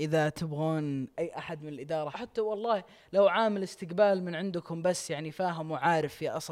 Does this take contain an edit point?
yes; 1 cut; at 2.1 s

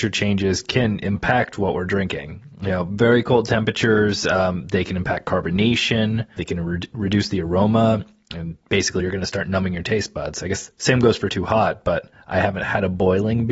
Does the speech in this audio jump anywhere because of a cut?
yes; 2 cuts; at 6.4 s, 9.0 s

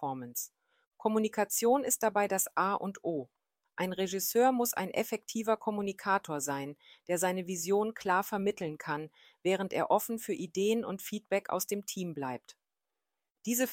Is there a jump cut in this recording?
no; 0 cuts

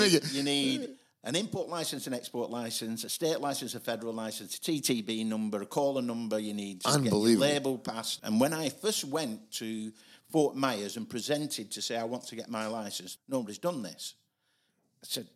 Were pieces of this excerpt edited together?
yes; 2 cuts; at 8.2 s, 13.2 s

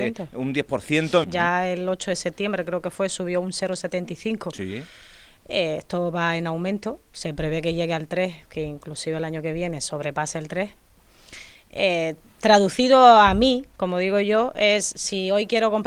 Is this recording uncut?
no; 1 cut; at 1.2 s

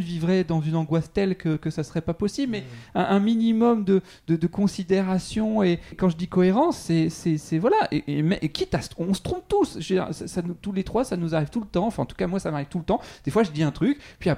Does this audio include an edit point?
yes; 1 cut; at 5.9 s

